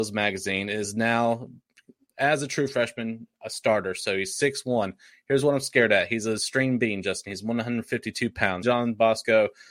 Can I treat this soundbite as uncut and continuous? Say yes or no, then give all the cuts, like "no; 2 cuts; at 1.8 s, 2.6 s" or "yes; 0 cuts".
no; 1 cut; at 8.6 s